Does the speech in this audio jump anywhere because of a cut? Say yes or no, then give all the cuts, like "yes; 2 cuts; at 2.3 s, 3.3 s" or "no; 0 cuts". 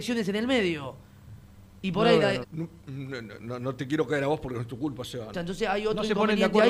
yes; 2 cuts; at 2.4 s, 5.3 s